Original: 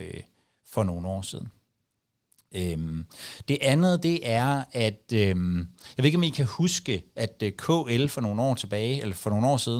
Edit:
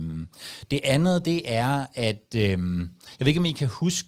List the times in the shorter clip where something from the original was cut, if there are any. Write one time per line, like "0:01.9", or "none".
none